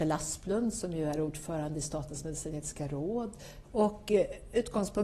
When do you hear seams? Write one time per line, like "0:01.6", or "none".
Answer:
0:03.6